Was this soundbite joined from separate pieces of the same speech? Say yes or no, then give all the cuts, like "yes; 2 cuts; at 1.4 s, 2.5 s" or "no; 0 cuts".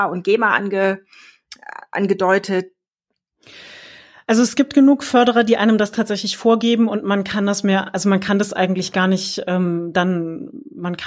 no; 0 cuts